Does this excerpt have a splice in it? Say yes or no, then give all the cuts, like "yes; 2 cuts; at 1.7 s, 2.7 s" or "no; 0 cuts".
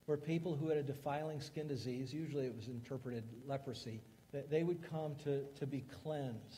yes; 1 cut; at 4.2 s